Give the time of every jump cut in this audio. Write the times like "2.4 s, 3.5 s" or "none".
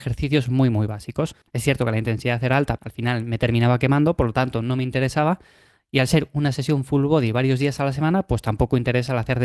1.4 s, 2.8 s